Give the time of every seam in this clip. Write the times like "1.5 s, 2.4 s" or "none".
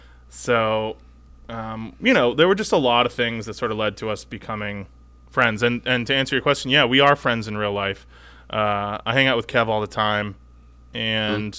none